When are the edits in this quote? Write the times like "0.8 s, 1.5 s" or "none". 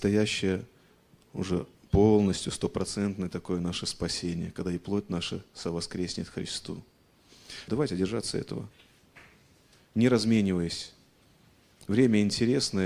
7.7 s